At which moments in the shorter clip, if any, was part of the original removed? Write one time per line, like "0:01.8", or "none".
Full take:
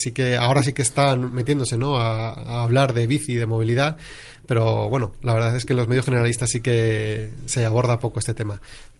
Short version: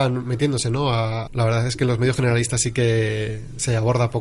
0:01.3